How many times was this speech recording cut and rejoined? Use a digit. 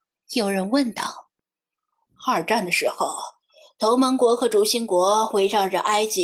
1